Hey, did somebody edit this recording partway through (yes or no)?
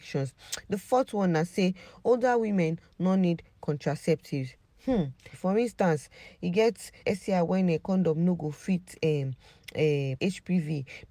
yes